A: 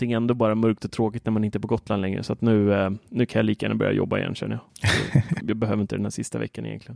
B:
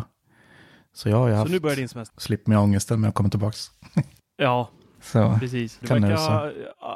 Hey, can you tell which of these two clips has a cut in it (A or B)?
B